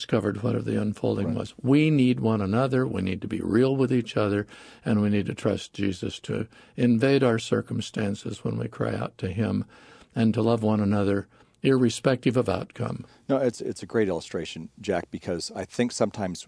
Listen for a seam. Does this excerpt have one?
no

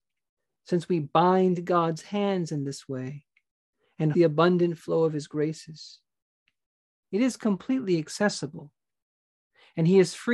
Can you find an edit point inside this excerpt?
yes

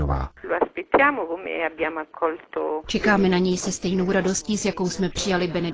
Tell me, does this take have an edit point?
no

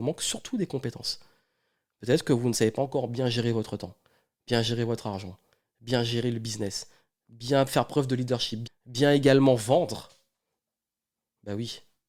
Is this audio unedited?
no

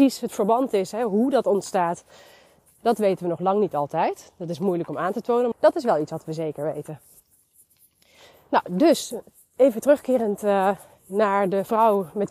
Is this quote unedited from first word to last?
no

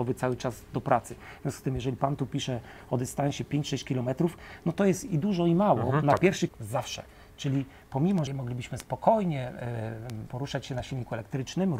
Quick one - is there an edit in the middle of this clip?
yes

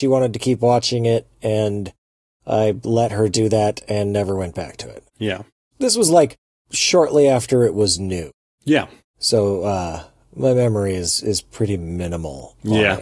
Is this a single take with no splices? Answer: yes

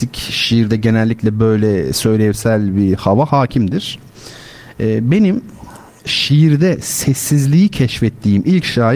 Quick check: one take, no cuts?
no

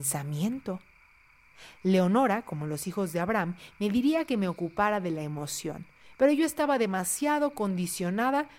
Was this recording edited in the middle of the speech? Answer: no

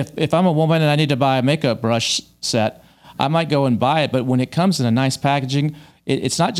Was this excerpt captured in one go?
yes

